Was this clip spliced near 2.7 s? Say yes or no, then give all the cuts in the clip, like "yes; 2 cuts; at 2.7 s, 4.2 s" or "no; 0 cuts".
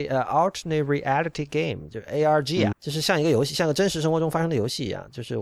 yes; 1 cut; at 2.7 s